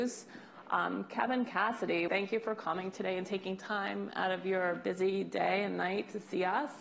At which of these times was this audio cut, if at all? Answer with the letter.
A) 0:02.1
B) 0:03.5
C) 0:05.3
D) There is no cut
A